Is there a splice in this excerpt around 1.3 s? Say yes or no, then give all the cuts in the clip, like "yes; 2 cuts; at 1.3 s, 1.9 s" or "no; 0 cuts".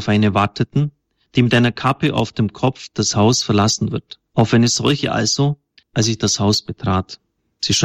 no; 2 cuts; at 4.3 s, 5.8 s